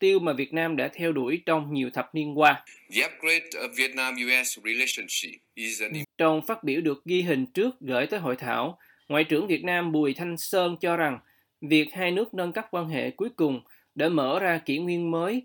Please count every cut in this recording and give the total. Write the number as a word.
one